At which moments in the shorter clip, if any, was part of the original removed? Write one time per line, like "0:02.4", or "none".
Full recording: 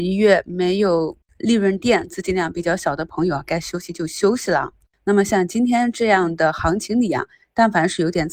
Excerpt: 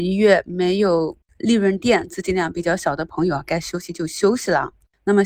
none